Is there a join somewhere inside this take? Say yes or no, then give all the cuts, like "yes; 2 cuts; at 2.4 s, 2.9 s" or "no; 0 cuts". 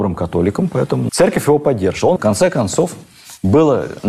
yes; 2 cuts; at 1.1 s, 2.2 s